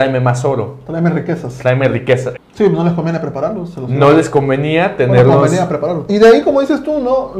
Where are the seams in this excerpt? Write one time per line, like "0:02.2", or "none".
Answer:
0:02.3
0:06.1